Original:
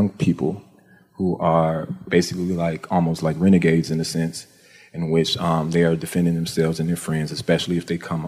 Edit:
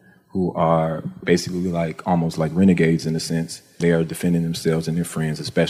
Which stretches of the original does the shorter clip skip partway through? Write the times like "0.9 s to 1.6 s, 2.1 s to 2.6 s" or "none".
4.6 s to 5.7 s